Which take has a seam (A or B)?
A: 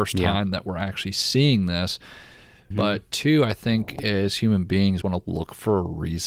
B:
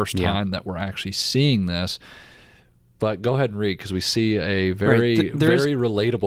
A